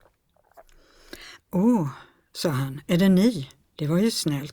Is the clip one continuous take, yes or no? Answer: no